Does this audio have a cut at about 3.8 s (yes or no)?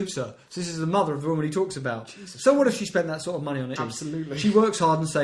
yes